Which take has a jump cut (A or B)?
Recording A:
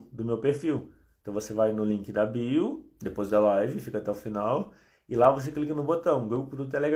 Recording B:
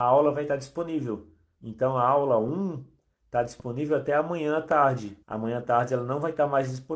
B